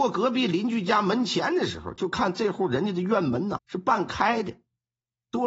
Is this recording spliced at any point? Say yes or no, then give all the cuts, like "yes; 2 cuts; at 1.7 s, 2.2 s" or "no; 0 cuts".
yes; 1 cut; at 3.6 s